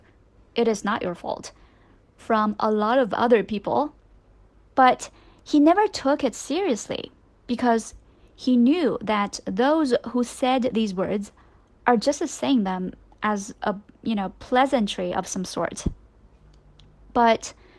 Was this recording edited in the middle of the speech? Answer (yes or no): no